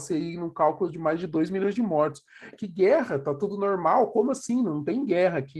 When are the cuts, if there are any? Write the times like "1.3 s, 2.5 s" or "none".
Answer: 2.5 s